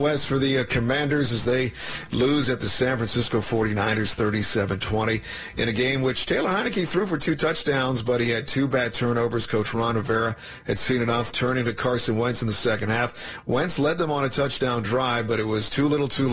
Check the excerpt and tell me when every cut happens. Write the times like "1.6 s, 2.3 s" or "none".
11.3 s